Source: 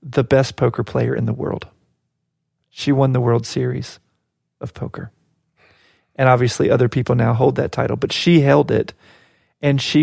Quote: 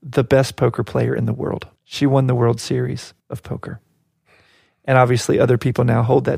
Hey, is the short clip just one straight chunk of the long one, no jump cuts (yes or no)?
no